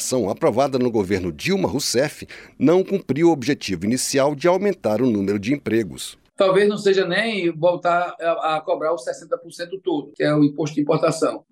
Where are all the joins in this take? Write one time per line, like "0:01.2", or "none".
0:06.3